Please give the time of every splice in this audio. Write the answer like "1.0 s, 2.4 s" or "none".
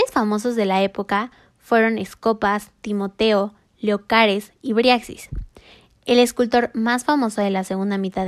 none